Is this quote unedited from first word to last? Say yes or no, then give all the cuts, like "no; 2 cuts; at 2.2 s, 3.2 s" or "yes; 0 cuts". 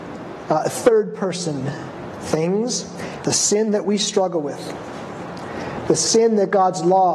no; 1 cut; at 3.2 s